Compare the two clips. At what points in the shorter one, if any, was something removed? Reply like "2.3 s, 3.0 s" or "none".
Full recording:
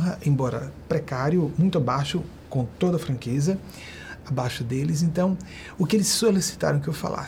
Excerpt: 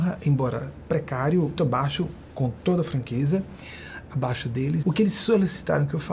1.6 s, 4.8 s